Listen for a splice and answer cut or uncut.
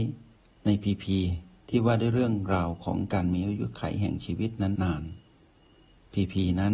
cut